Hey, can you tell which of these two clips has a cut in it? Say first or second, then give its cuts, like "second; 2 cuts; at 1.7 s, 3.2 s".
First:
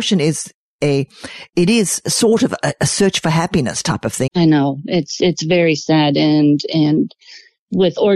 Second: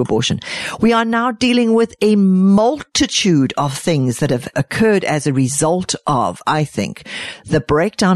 first; 1 cut; at 4.3 s